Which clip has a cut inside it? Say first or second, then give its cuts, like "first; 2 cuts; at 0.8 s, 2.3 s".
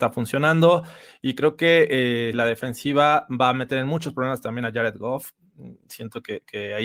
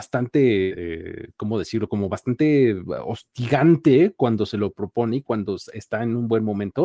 first; 1 cut; at 2.3 s